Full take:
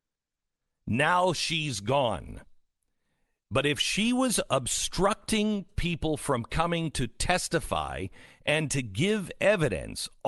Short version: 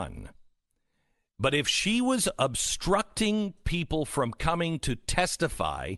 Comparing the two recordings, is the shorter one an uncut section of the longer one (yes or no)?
yes